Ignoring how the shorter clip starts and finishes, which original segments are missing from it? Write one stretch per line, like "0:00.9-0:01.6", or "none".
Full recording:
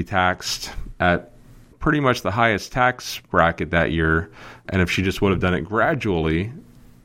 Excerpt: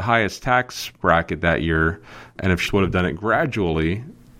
0:05.0-0:05.1